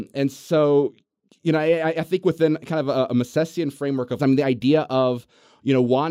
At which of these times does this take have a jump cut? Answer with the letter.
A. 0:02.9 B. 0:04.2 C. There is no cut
B